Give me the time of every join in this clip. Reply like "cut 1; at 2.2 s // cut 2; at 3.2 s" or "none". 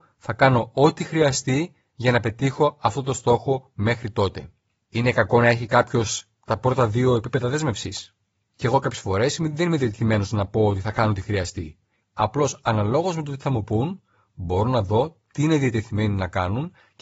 cut 1; at 8.5 s // cut 2; at 12.0 s